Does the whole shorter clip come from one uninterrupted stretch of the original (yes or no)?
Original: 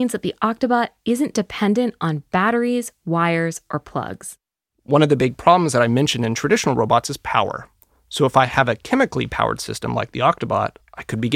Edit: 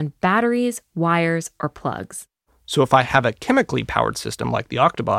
no